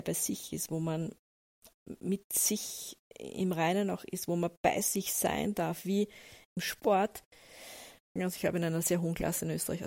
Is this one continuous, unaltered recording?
no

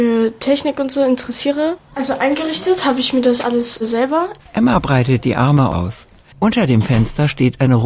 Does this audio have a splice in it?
yes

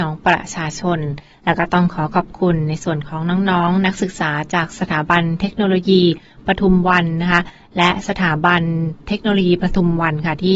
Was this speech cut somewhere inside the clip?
no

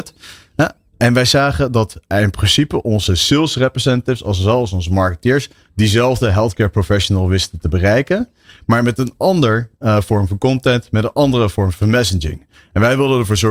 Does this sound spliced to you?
no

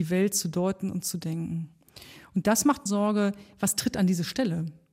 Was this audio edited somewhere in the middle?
yes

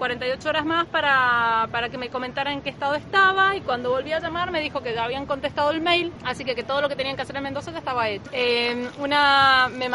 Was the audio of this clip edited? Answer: yes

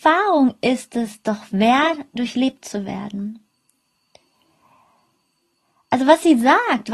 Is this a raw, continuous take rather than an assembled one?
yes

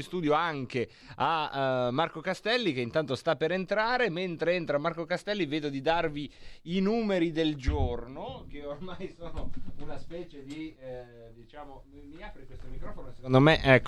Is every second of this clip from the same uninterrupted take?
yes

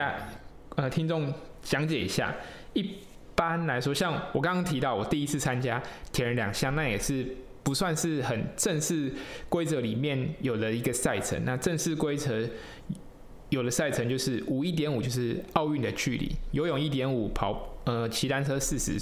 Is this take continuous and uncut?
yes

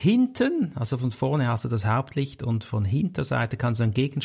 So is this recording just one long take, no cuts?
yes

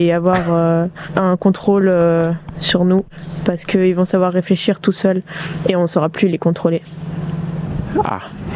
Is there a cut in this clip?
no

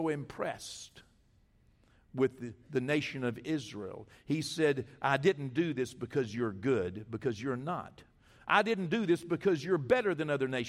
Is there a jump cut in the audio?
no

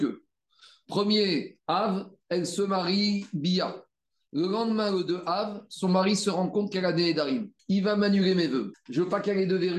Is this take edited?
yes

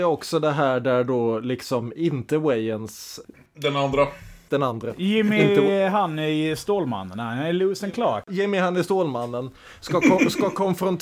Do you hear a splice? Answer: yes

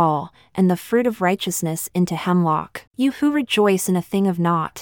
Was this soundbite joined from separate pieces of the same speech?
yes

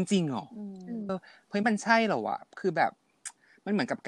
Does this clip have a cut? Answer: yes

